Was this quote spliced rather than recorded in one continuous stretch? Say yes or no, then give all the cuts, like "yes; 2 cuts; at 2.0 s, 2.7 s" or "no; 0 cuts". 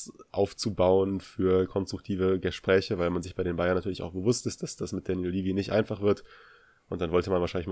no; 0 cuts